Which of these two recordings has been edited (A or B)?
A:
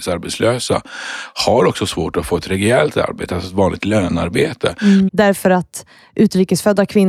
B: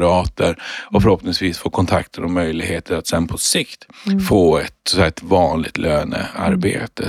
A